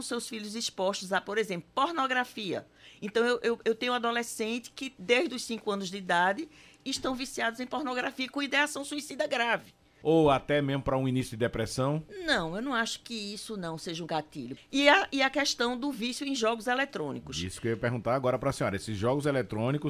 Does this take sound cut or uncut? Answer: cut